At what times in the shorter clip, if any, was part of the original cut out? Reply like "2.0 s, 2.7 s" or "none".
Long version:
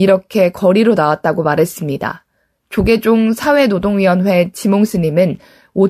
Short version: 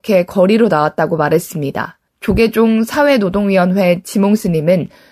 2.1 s